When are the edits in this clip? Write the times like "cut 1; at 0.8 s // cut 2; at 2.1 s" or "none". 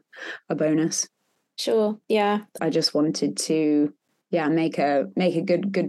cut 1; at 2.6 s